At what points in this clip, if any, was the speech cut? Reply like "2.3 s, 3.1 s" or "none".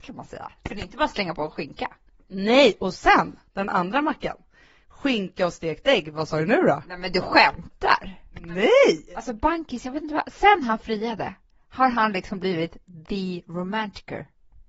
3.5 s